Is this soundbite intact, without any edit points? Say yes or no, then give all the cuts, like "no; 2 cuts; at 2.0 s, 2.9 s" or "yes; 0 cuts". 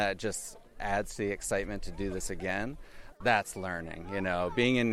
no; 1 cut; at 3.1 s